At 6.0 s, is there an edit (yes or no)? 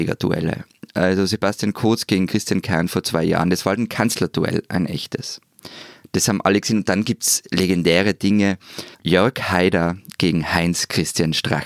no